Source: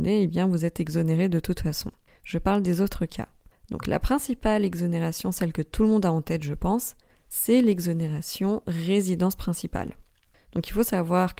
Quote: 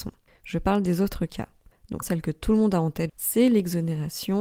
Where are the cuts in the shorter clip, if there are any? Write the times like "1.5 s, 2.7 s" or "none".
2.0 s, 3.1 s